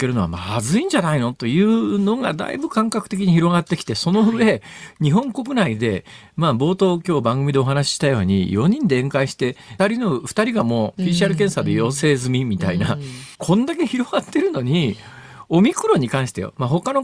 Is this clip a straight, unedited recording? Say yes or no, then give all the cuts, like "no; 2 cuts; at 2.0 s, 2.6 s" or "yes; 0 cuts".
no; 2 cuts; at 9.8 s, 13.3 s